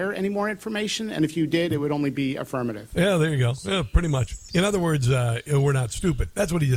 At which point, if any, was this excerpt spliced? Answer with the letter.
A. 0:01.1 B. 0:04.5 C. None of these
B